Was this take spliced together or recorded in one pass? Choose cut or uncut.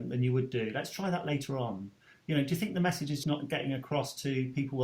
cut